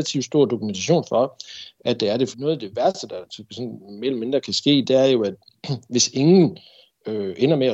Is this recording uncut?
no; 1 cut; at 2.3 s

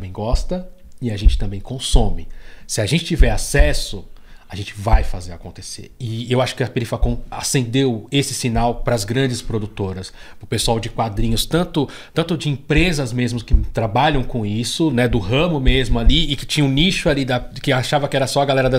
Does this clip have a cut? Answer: no; 0 cuts

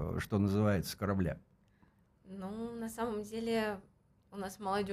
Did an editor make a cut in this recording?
no; 0 cuts

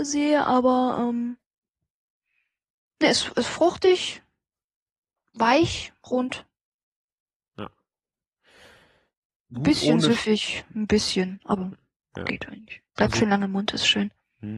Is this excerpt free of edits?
yes; 0 cuts

